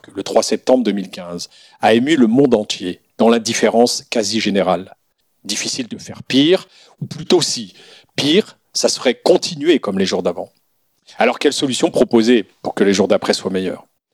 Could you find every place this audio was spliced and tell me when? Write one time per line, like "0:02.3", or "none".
0:03.1